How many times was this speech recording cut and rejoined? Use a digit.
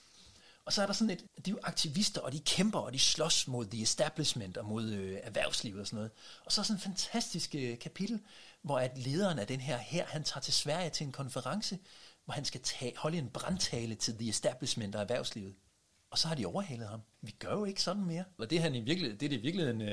2